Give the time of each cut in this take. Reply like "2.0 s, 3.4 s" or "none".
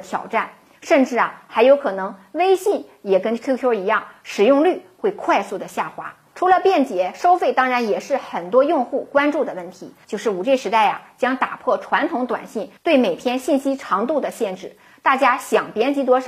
6.3 s, 10.0 s